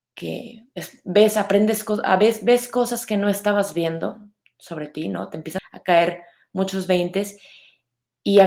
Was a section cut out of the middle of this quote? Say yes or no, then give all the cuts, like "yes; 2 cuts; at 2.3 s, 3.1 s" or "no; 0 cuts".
yes; 1 cut; at 5.6 s